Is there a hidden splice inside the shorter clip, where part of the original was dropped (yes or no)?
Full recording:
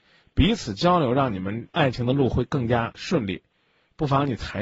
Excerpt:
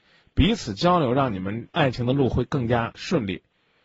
no